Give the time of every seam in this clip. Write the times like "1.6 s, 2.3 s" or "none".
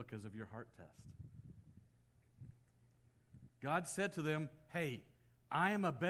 3.5 s